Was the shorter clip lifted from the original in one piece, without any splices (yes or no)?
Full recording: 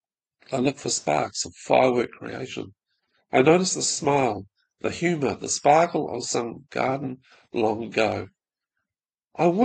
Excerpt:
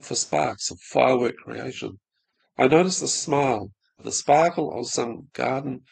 no